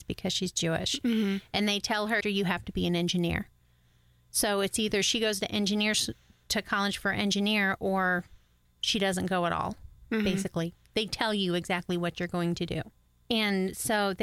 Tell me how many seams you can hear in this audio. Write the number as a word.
one